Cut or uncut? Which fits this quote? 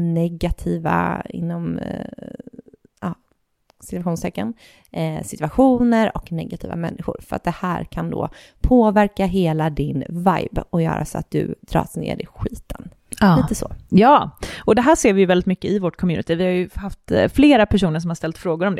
uncut